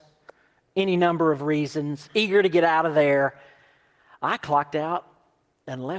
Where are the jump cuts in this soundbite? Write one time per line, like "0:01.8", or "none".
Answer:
none